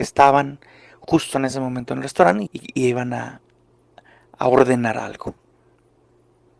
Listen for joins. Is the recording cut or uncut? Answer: cut